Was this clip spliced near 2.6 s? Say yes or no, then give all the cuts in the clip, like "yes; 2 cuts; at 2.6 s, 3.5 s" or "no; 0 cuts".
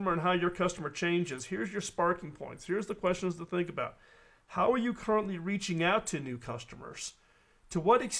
no; 0 cuts